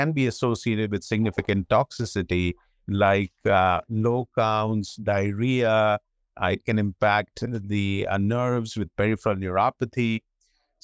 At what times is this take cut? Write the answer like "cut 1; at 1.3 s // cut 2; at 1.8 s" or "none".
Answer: none